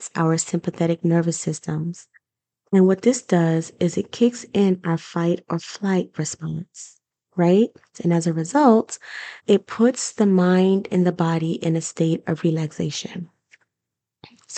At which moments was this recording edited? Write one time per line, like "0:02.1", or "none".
0:07.9
0:09.4